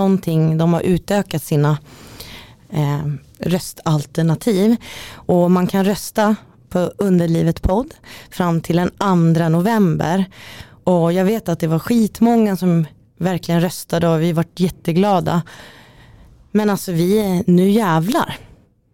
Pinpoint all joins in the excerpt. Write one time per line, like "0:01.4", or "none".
none